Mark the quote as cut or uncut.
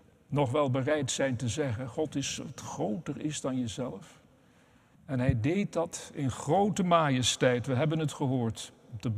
cut